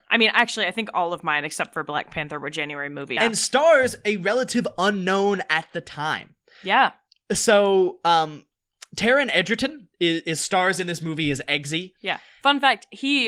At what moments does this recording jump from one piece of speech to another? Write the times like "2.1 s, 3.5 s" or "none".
3.2 s